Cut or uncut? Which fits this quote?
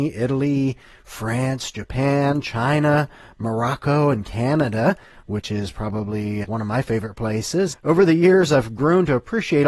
cut